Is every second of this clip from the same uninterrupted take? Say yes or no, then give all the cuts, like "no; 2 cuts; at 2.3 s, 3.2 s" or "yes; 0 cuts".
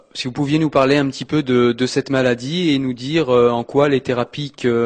yes; 0 cuts